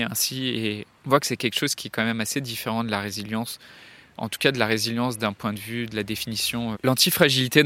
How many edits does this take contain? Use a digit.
3